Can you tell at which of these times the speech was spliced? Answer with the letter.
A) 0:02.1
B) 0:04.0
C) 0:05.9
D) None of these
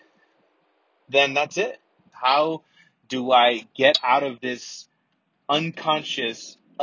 A